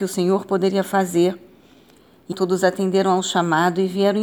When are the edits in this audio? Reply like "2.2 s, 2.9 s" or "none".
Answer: 2.3 s

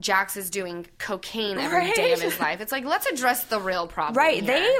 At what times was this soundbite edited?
none

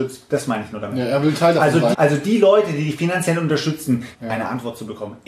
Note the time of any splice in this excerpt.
1.9 s, 4.1 s

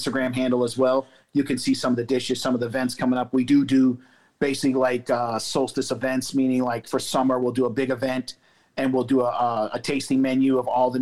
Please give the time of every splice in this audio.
none

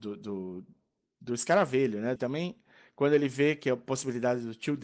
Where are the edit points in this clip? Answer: 2.2 s

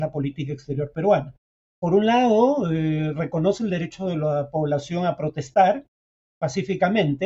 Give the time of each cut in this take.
none

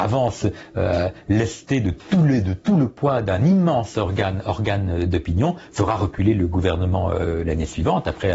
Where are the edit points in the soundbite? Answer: none

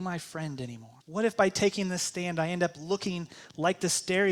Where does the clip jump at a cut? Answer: 1.0 s

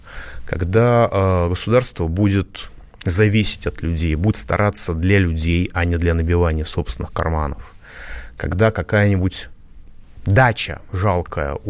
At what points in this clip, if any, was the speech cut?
none

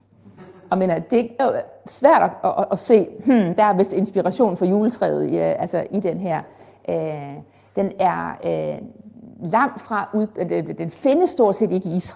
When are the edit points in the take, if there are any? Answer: 1.4 s

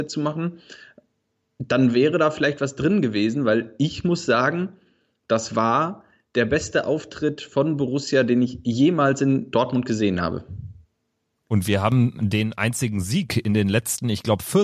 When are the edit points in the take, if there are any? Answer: none

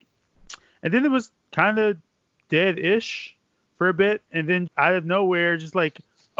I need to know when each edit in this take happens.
4.7 s

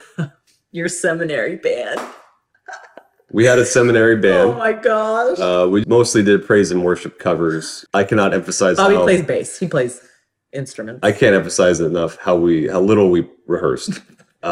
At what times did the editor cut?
5.8 s, 7.9 s

